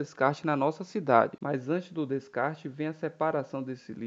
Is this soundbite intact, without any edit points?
no; 1 cut; at 1.4 s

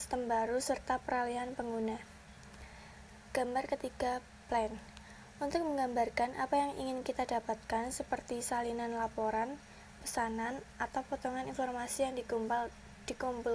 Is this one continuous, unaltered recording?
yes; 0 cuts

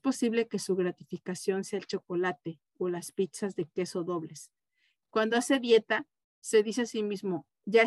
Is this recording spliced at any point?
no; 0 cuts

